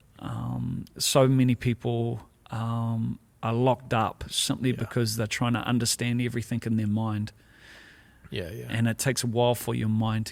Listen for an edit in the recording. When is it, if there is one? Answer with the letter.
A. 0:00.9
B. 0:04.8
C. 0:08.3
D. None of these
C